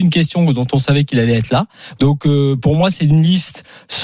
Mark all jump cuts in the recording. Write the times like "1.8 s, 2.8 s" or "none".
2.0 s